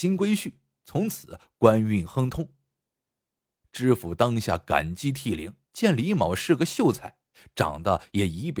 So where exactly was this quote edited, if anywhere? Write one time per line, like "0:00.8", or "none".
0:03.6
0:05.6

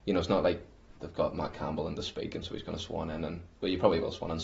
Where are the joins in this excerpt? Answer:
0:01.0

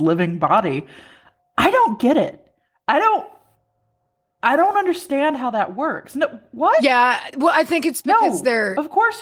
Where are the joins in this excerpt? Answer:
0:07.3

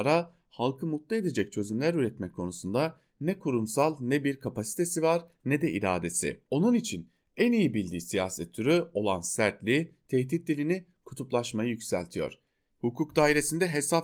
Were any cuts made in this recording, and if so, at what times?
0:06.4
0:12.7

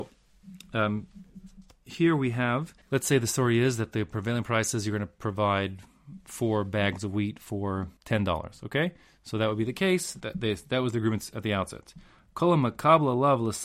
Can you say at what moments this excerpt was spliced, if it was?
0:02.8
0:08.0
0:10.2

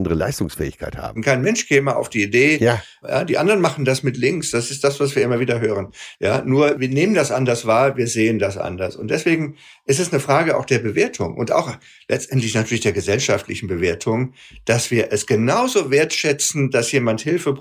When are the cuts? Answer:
0:01.2
0:03.0
0:06.1

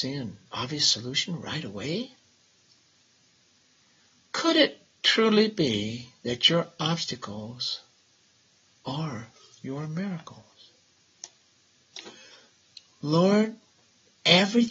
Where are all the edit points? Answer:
none

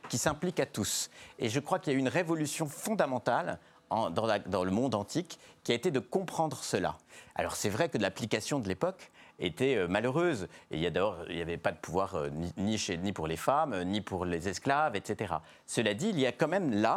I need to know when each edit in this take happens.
none

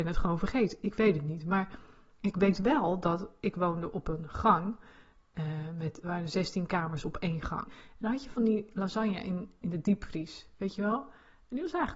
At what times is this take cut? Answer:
0:06.0
0:07.6

